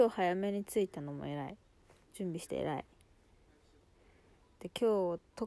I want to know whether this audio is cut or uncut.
cut